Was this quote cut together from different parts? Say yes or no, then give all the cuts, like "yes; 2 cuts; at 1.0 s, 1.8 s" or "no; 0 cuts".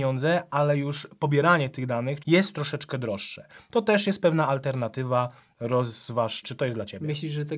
yes; 2 cuts; at 2.2 s, 6.4 s